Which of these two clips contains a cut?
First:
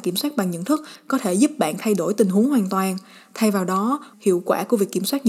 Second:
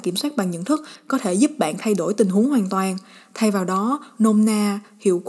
first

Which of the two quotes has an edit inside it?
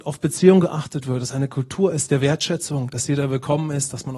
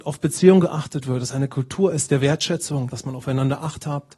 second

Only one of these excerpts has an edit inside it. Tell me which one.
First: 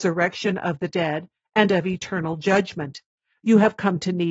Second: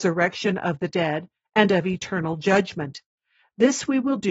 first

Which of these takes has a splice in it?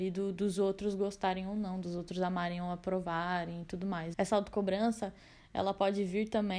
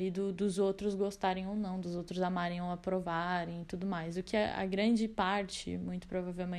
first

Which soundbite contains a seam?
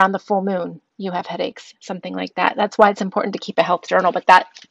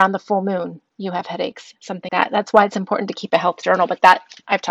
second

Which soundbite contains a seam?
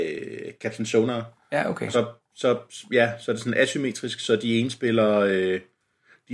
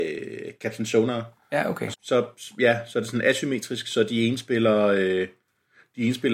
second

